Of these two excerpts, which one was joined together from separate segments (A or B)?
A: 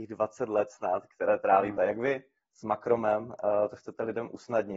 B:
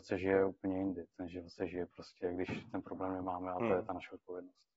A